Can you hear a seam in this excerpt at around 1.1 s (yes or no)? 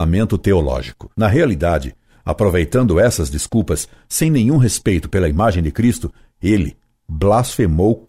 yes